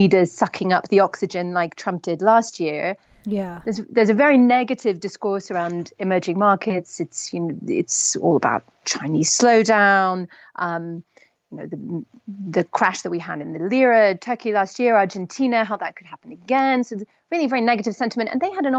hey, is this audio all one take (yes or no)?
yes